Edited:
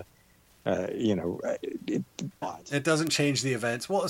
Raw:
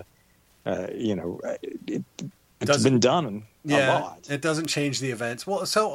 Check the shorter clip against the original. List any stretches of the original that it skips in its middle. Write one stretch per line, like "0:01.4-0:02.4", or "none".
0:02.4-0:04.0